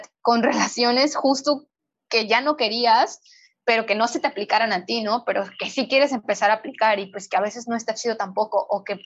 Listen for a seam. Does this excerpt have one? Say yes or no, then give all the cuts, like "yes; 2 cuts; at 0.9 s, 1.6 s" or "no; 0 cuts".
no; 0 cuts